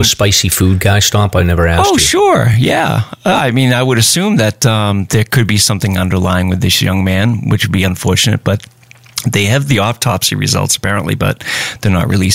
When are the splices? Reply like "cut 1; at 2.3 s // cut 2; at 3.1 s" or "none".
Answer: none